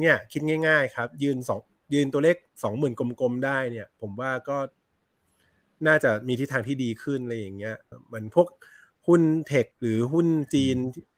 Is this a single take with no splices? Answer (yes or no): no